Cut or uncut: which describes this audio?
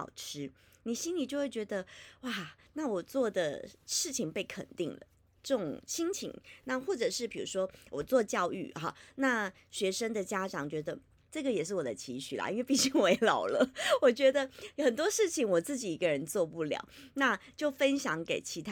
cut